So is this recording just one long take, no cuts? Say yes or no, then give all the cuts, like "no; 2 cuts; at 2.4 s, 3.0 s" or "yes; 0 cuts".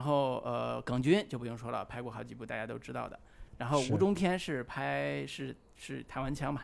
yes; 0 cuts